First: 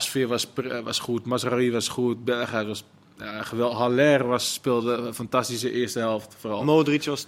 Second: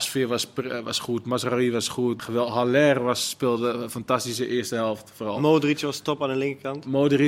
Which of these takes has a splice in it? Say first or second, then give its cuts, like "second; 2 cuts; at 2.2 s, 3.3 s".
second; 1 cut; at 2.2 s